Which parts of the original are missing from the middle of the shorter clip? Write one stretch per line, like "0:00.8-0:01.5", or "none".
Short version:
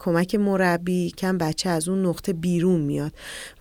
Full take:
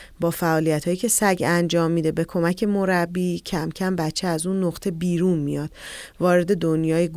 0:03.4-0:03.7